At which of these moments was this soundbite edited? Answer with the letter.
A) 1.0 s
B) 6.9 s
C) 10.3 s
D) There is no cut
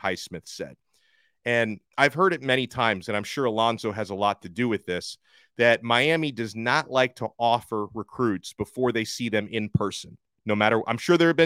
D